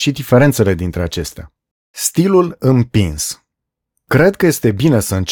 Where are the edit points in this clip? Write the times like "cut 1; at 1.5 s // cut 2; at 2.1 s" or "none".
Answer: cut 1; at 1.7 s